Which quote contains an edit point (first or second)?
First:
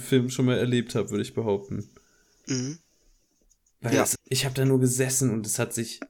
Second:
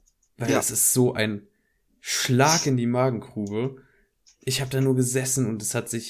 first